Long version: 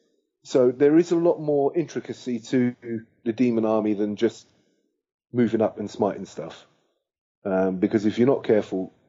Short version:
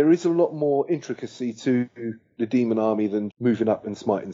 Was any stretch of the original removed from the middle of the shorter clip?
yes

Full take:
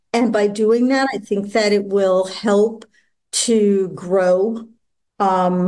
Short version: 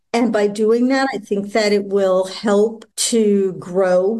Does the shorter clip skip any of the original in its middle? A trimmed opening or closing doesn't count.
yes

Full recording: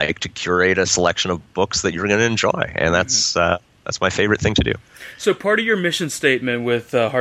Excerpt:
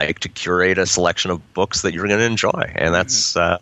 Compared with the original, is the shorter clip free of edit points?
yes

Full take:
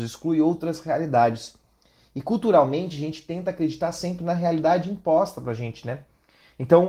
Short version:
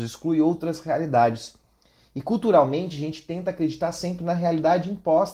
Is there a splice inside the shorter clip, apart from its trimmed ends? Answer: no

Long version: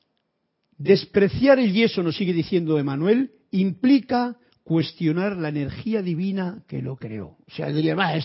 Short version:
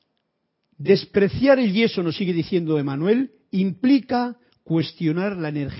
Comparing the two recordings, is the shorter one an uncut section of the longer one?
yes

